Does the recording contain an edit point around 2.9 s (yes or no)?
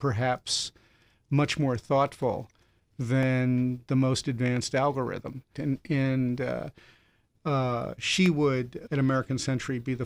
no